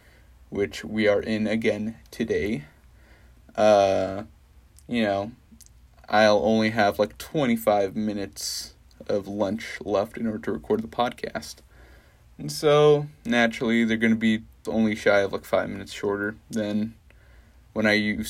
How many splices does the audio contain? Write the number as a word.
one